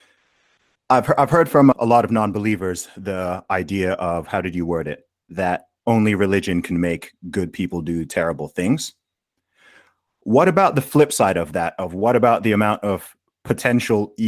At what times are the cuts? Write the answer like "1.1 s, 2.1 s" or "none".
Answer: 1.7 s